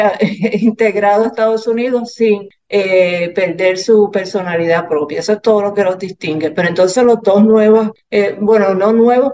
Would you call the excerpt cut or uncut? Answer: uncut